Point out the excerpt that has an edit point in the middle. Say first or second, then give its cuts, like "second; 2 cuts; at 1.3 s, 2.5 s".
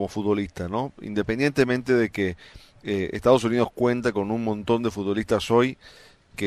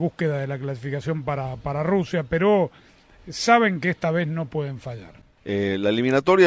second; 1 cut; at 5.4 s